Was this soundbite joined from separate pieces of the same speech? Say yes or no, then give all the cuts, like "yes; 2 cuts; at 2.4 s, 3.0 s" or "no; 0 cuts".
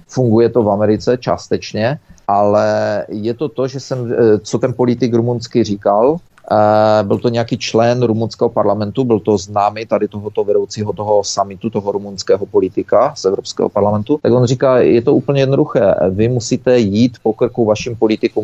no; 0 cuts